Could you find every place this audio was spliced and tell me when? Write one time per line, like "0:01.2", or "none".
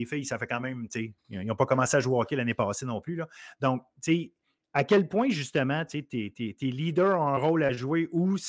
none